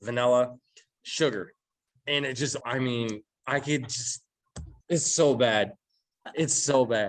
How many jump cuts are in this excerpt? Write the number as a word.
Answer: two